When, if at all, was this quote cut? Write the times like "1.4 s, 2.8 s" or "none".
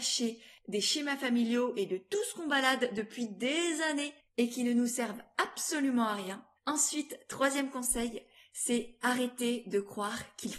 6.6 s